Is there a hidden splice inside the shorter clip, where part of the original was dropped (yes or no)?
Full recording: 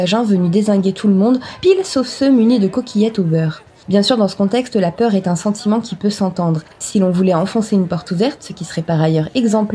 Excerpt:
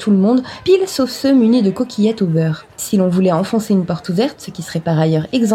yes